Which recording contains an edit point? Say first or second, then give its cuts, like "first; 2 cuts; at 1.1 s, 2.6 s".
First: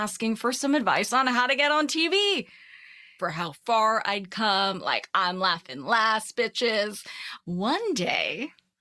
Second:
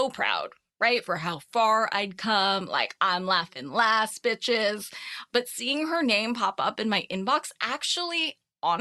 first; 2 cuts; at 3.2 s, 7.4 s